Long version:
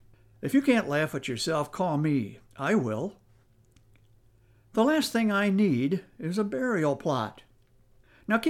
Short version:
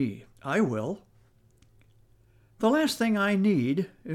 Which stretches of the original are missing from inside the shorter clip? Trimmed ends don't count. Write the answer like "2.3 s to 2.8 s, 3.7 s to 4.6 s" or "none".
none

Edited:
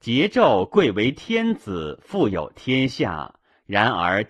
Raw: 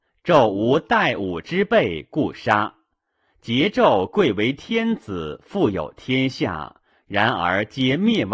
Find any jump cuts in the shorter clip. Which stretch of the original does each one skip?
none

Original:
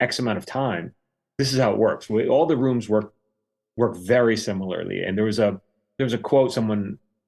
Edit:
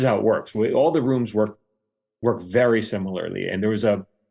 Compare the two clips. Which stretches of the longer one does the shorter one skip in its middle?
none

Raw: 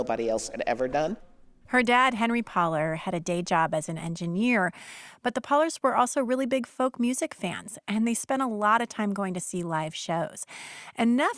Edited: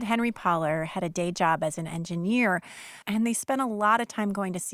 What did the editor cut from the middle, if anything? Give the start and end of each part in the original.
5.1 s to 7.8 s

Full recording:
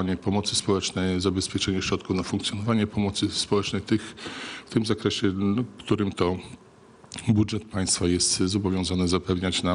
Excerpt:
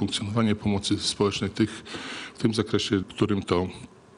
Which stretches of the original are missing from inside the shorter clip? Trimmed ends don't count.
5.3 s to 5.7 s

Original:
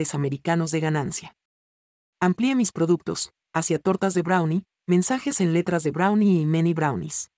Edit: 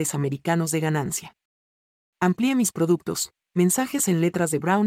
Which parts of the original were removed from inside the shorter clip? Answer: 3.5 s to 4.8 s

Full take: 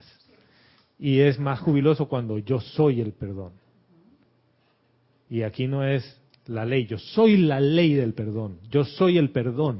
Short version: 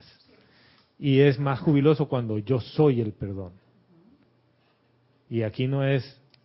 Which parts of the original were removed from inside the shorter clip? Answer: none

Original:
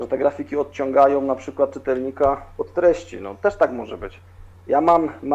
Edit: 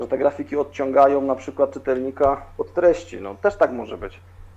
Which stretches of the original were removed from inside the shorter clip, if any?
none

